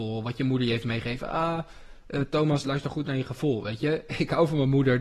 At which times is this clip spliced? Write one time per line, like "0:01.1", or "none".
0:02.6